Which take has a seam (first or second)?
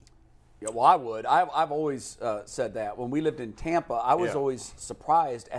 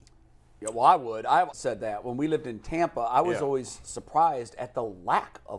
second